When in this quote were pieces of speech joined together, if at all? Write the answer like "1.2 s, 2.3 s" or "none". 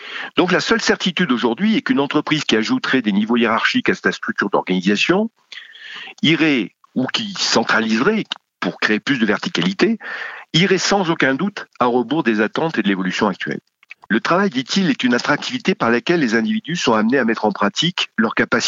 14.1 s